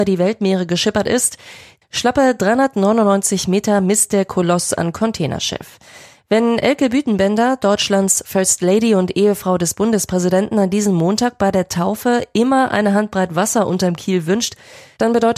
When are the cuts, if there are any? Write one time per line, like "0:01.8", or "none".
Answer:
0:01.8